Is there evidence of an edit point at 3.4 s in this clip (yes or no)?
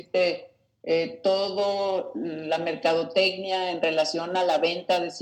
no